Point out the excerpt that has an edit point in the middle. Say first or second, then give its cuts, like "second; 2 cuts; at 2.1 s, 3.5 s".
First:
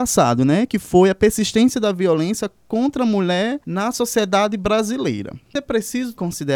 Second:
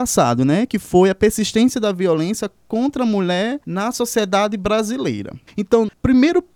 second; 1 cut; at 5.5 s